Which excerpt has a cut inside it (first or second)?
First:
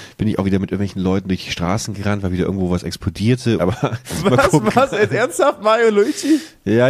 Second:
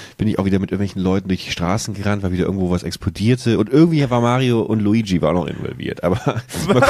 first